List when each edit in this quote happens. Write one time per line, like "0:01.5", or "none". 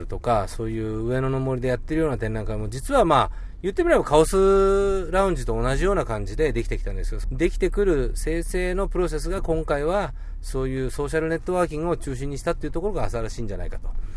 0:07.2